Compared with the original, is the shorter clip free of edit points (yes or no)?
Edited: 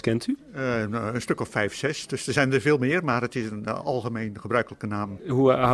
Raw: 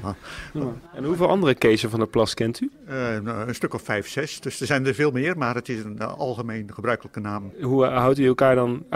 yes